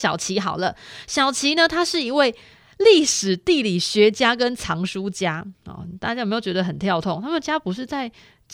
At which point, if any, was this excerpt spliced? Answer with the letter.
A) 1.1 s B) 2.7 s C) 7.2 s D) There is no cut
D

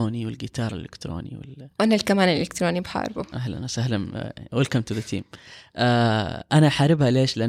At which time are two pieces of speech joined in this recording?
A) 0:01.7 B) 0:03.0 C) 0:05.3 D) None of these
D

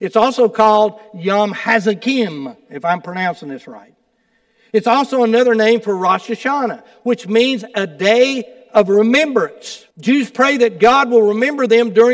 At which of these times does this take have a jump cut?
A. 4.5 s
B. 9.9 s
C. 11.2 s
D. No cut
B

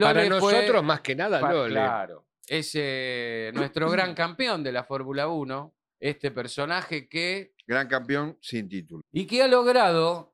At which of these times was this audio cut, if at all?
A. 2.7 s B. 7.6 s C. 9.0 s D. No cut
C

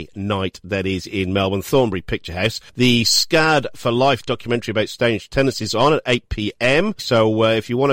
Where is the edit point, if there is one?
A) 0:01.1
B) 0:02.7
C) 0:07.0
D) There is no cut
C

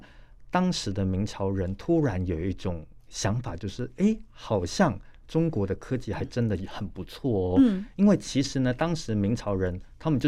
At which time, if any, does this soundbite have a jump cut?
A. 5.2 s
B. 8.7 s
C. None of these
C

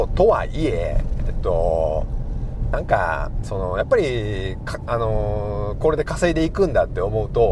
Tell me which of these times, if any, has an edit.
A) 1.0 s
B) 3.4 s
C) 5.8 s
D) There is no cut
B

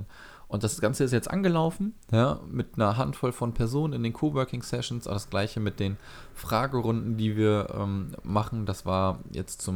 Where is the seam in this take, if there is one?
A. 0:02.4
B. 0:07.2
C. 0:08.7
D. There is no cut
D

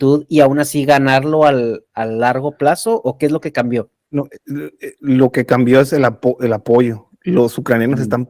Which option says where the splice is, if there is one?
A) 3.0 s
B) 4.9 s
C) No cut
C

